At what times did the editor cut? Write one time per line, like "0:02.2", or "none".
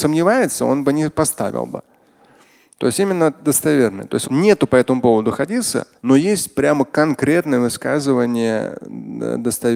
0:04.2
0:06.0